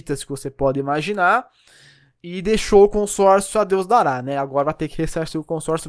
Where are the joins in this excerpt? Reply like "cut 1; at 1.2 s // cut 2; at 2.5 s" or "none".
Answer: none